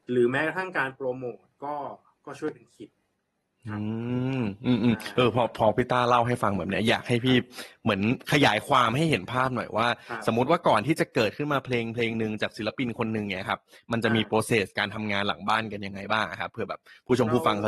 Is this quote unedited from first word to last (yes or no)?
yes